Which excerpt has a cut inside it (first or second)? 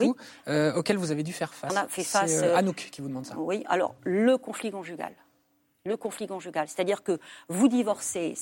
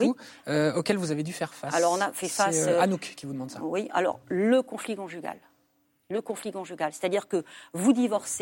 first